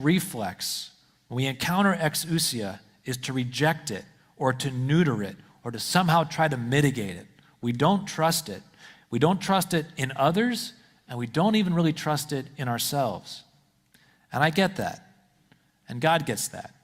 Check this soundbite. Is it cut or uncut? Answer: uncut